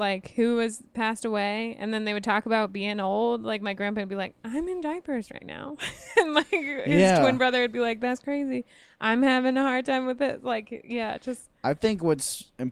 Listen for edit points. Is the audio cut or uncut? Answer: uncut